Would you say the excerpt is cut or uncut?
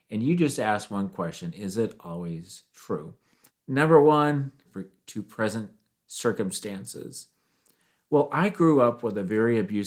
cut